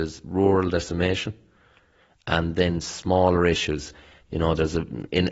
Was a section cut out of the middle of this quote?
yes; 1 cut; at 4.2 s

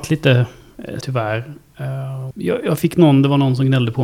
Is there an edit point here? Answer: yes; 2 cuts; at 1.0 s, 2.3 s

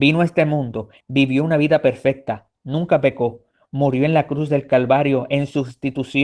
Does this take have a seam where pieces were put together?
yes; 1 cut; at 1.0 s

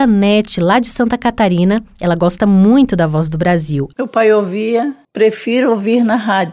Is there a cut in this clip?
yes; 1 cut; at 3.9 s

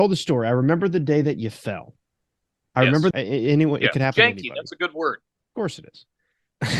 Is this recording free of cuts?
no; 1 cut; at 3.1 s

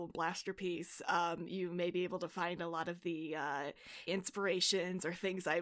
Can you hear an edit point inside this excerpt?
yes; 1 cut; at 4.1 s

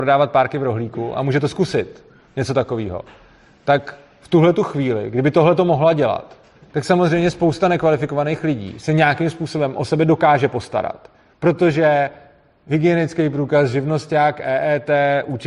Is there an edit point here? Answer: yes; 1 cut; at 11.3 s

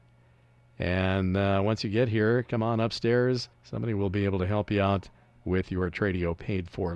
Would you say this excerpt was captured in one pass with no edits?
no; 1 cut; at 3.5 s

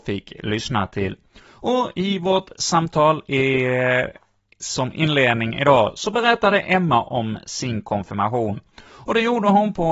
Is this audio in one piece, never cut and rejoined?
yes; 0 cuts

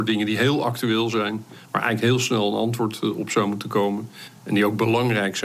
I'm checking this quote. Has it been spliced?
no; 0 cuts

